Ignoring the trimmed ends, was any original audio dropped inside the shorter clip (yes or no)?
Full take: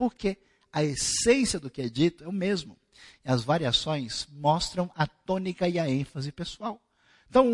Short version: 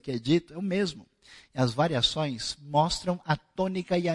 no